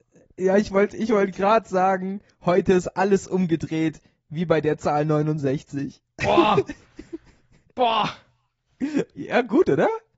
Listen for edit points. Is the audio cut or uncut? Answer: uncut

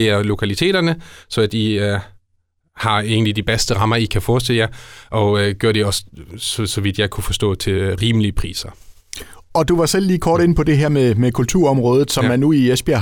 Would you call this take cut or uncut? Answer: uncut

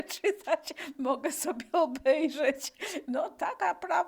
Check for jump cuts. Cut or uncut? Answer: cut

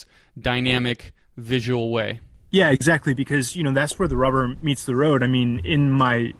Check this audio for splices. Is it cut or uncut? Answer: uncut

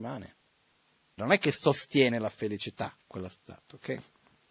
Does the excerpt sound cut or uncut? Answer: cut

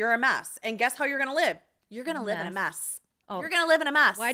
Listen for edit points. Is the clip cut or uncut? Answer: uncut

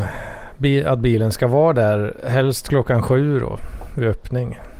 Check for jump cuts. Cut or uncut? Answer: uncut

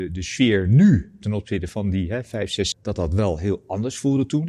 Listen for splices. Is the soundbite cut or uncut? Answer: cut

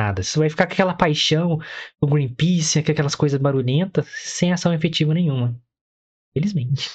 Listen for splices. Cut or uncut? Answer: uncut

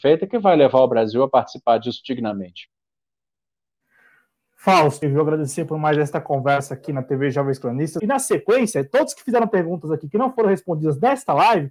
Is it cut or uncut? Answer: cut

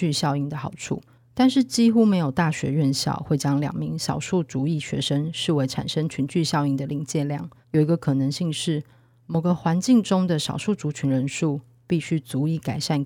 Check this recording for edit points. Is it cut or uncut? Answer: cut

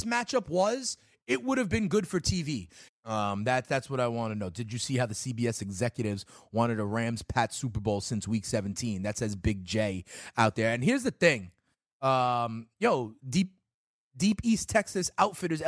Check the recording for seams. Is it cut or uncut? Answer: cut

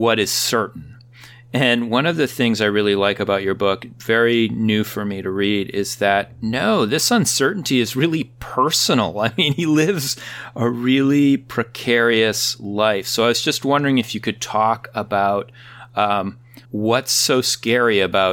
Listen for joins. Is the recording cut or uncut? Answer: cut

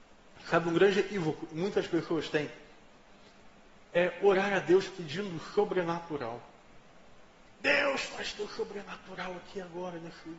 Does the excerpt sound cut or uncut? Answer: uncut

